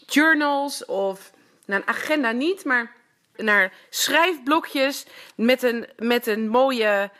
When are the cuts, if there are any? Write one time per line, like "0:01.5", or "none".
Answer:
0:03.3